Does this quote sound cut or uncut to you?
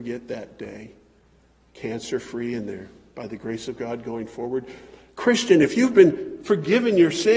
uncut